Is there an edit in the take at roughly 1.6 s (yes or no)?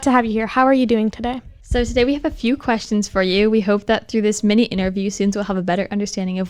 yes